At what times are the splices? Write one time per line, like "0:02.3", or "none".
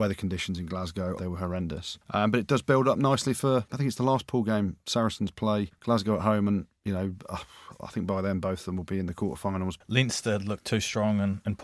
0:01.2